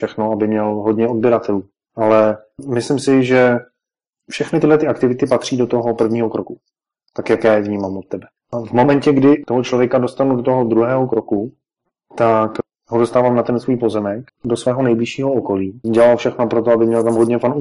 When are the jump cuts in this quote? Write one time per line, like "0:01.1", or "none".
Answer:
0:14.3
0:15.8